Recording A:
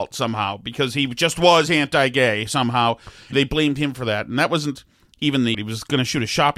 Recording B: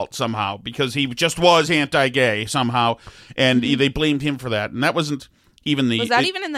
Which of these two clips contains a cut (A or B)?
A